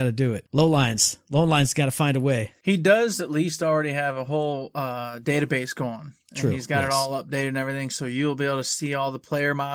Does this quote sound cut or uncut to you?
uncut